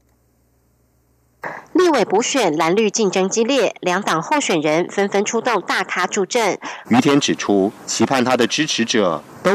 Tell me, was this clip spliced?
yes; 2 cuts; at 6.8 s, 7.8 s

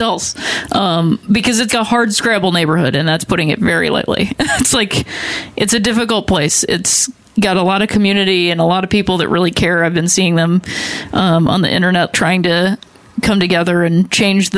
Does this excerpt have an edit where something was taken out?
yes; 2 cuts; at 1.7 s, 12.1 s

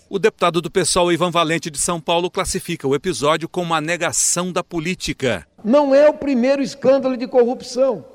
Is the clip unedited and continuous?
yes; 0 cuts

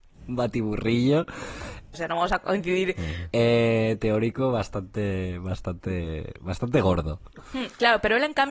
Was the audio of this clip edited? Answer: yes; 2 cuts; at 1.9 s, 3.3 s

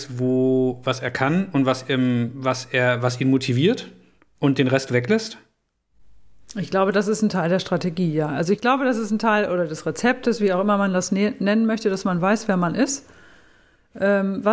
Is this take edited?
no; 0 cuts

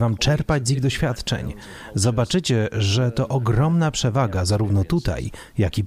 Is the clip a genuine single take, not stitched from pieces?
yes; 0 cuts

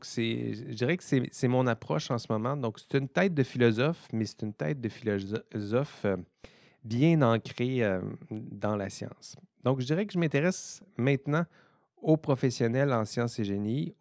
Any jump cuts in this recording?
yes; 1 cut; at 2.9 s

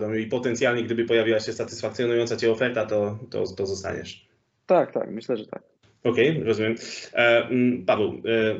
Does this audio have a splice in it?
no; 0 cuts

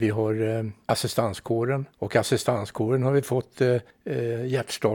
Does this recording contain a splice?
yes; 1 cut; at 1.9 s

